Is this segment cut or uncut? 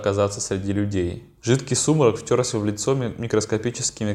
cut